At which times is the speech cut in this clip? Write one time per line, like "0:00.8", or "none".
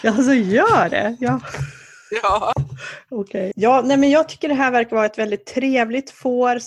0:03.5